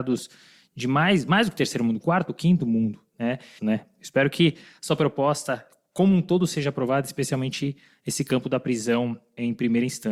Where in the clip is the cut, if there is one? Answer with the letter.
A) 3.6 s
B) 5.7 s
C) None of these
A